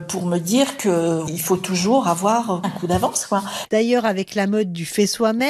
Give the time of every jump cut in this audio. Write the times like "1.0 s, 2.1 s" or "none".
2.6 s